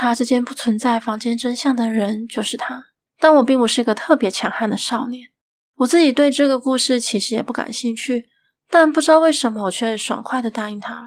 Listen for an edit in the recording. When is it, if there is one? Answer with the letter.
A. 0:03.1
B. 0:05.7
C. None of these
A